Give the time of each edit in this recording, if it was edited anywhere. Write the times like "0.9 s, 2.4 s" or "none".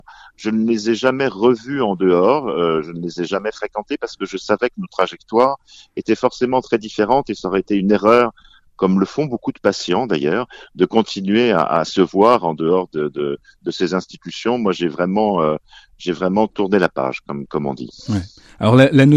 none

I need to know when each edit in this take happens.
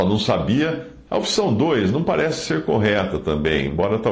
1.1 s

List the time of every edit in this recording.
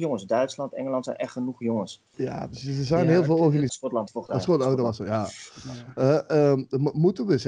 2.1 s, 3.7 s

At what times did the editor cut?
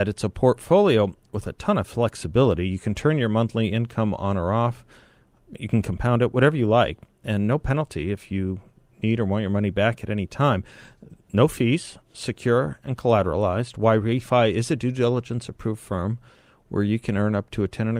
none

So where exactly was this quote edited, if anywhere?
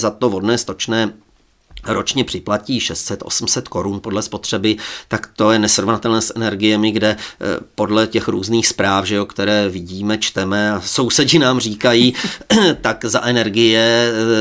none

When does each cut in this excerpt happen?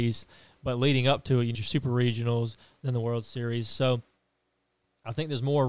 1.5 s

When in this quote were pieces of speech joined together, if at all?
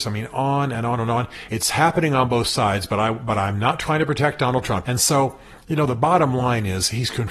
1.5 s, 4.8 s

